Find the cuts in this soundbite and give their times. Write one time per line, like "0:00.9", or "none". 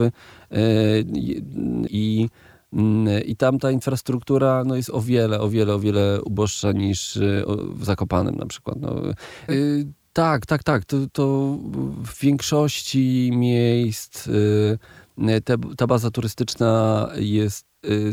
0:01.9
0:09.5